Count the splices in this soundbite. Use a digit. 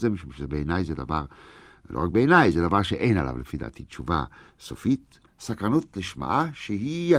1